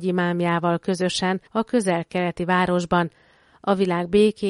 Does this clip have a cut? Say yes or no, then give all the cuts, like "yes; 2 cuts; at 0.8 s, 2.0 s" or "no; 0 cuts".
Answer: yes; 1 cut; at 1.5 s